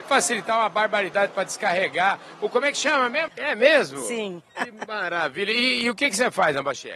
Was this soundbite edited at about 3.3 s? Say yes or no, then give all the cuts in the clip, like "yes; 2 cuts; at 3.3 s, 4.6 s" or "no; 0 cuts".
yes; 1 cut; at 3.3 s